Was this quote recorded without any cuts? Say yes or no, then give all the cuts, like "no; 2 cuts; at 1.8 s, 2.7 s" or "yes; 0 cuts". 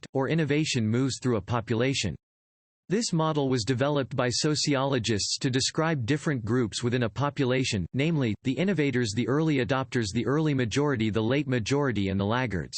yes; 0 cuts